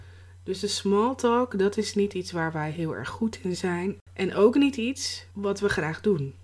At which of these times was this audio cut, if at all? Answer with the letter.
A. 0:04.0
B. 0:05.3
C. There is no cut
B